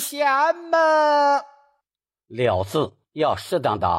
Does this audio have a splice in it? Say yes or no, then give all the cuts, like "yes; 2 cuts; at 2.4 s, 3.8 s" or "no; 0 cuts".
no; 0 cuts